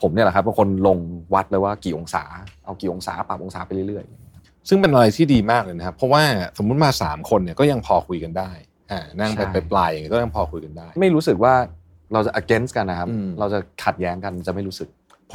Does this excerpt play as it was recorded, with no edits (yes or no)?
yes